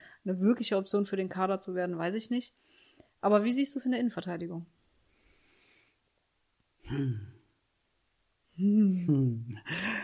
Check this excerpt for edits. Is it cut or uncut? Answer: uncut